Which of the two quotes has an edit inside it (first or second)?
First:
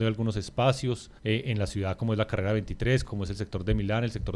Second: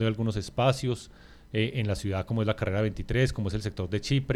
first